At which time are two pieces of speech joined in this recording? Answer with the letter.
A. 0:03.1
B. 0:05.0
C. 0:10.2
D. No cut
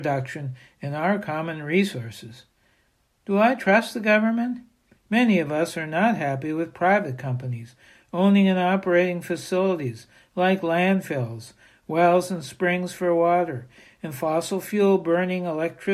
B